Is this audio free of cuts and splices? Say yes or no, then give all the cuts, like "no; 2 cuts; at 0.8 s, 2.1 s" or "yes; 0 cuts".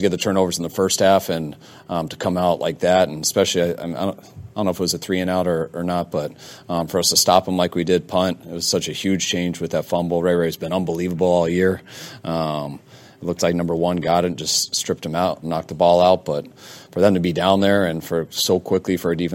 no; 1 cut; at 15.4 s